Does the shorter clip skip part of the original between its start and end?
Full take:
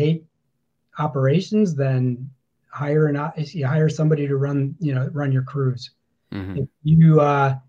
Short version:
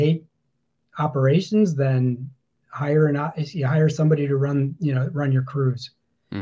no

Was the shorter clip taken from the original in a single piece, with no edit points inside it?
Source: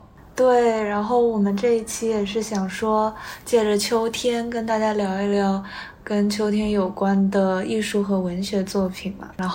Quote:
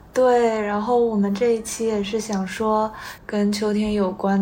no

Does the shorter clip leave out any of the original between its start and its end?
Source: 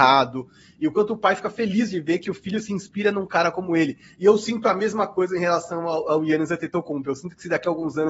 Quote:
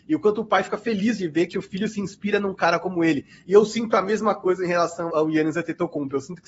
yes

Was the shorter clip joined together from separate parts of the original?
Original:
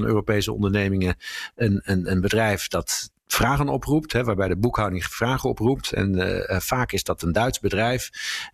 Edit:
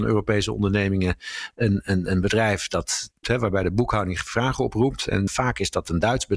yes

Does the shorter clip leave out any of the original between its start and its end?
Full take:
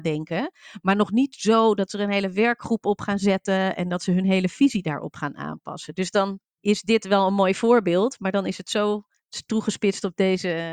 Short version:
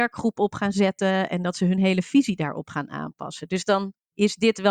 no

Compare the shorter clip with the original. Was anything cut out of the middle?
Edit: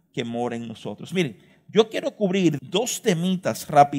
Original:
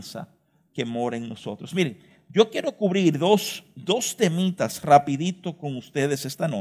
yes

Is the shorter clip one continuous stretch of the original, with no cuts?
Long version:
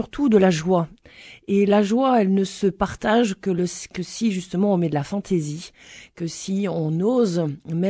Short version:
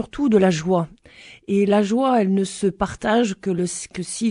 yes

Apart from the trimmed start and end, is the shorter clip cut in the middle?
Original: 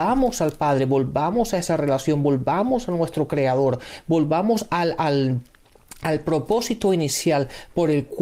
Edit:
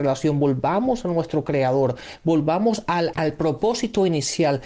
yes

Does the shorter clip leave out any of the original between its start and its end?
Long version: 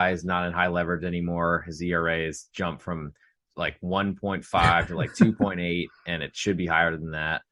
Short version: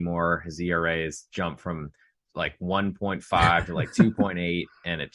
no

